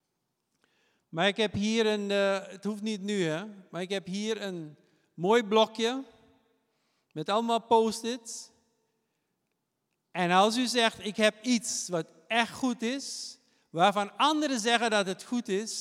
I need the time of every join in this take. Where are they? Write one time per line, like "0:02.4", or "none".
none